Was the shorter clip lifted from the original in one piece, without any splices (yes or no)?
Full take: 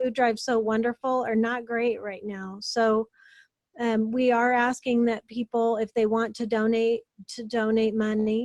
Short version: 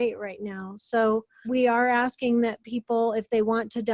no